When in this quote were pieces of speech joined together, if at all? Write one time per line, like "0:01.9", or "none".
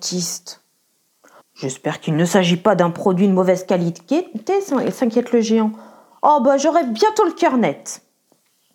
0:01.4